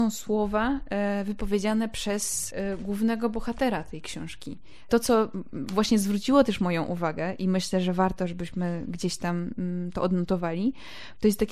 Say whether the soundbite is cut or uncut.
uncut